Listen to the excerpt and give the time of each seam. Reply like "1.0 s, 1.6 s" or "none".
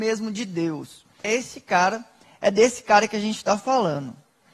1.2 s